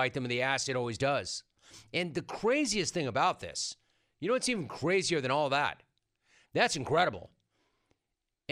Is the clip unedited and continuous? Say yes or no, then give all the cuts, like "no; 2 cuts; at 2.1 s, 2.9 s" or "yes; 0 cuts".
no; 1 cut; at 6.4 s